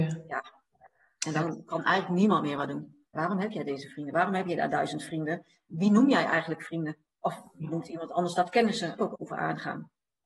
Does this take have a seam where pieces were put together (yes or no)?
yes